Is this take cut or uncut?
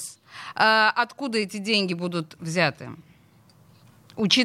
uncut